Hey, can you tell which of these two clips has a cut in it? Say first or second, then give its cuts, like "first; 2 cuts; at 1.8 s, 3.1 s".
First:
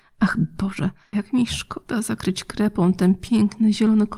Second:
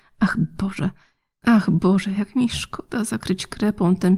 first; 1 cut; at 1.1 s